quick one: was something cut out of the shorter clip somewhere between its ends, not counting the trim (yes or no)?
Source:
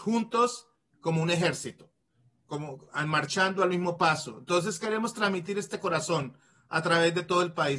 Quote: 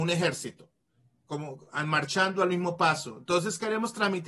no